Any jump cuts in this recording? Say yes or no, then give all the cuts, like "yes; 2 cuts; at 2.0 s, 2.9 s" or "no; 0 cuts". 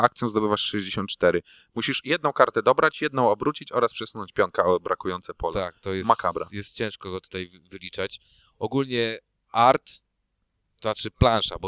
no; 0 cuts